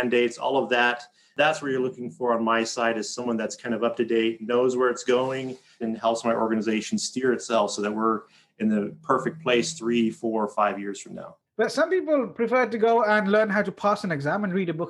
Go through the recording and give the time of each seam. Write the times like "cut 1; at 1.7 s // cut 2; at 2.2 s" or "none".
cut 1; at 5.8 s // cut 2; at 11.4 s